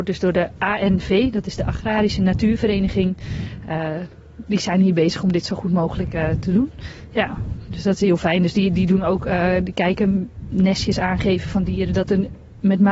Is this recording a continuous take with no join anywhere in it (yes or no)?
yes